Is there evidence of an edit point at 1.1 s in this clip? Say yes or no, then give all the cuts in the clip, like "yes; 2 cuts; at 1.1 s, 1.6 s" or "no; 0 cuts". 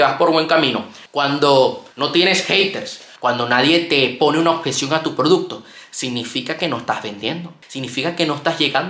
yes; 2 cuts; at 1.1 s, 3.2 s